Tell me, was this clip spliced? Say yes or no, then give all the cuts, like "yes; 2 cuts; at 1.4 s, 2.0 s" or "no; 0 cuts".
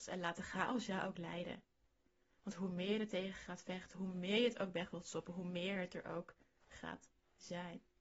no; 0 cuts